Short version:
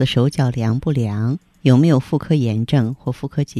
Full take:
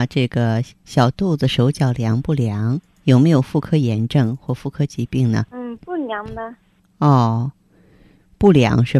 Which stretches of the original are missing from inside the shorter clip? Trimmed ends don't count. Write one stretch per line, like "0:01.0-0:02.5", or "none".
none